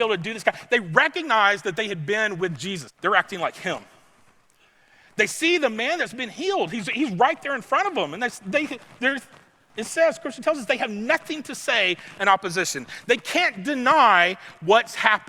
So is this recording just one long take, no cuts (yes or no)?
no